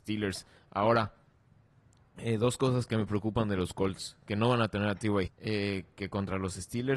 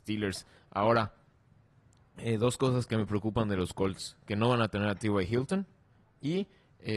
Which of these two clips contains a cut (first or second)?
first